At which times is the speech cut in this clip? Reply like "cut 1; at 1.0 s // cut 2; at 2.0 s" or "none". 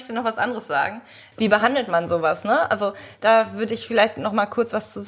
cut 1; at 1.3 s